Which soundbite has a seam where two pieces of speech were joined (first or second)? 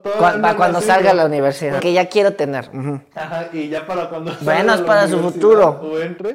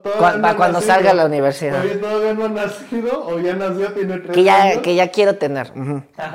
first